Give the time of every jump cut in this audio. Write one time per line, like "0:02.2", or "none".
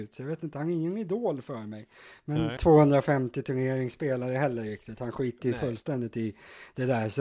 0:02.6